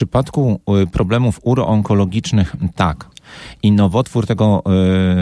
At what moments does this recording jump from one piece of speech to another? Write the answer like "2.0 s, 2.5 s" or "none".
3.1 s